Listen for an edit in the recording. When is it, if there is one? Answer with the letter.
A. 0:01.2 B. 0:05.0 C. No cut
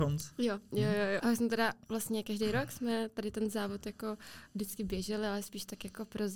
A